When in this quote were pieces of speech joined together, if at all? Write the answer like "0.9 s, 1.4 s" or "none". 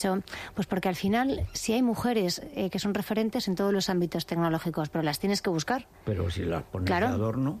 none